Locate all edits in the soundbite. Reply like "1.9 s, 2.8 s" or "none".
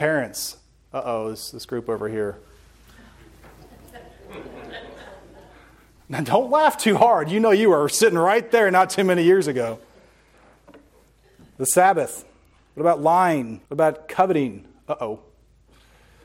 13.7 s